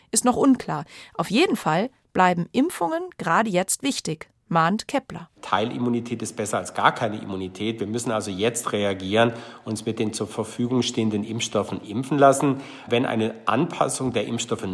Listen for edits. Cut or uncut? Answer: uncut